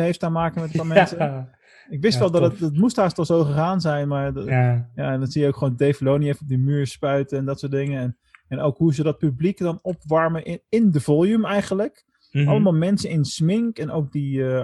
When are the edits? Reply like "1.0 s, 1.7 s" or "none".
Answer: none